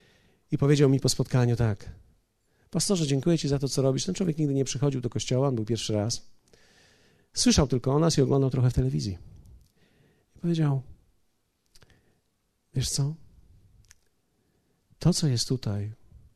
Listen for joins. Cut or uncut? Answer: uncut